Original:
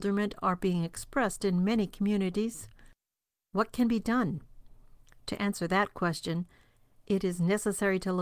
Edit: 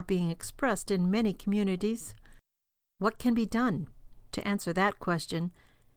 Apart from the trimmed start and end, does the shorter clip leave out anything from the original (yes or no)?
yes